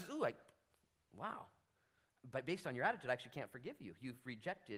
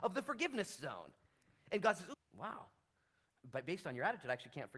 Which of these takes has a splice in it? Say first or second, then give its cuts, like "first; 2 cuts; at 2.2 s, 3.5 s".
second; 1 cut; at 2.1 s